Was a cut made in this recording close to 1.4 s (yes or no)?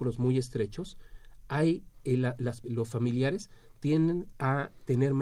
no